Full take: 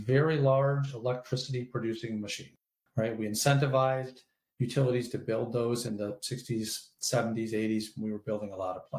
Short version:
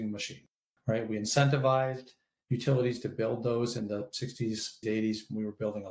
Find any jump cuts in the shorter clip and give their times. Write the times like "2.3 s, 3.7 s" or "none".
4.8 s